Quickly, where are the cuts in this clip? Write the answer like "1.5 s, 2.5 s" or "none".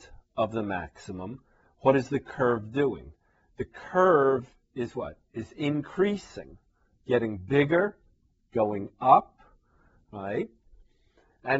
none